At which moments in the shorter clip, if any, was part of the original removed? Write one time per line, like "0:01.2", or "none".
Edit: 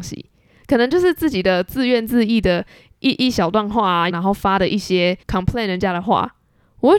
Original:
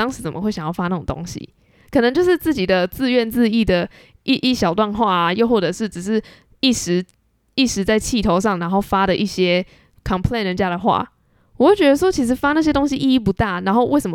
0:04.1
0:05.2